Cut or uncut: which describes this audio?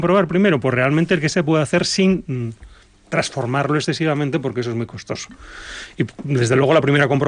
uncut